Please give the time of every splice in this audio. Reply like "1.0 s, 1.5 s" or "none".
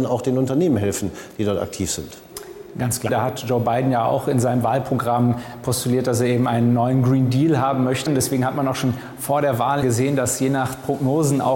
3.1 s, 8.1 s, 9.8 s